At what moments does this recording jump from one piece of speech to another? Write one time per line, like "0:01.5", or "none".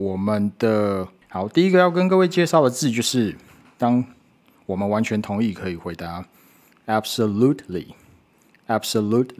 0:01.2

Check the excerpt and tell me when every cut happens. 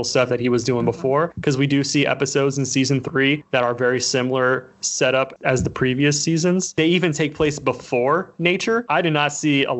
0:08.9

